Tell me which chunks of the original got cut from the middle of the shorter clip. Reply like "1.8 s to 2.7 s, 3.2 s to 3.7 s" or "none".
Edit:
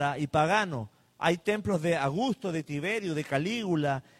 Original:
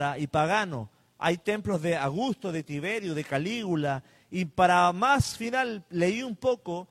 none